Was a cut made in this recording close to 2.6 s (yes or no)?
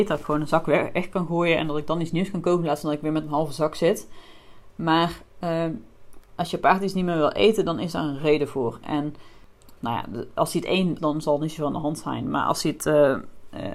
no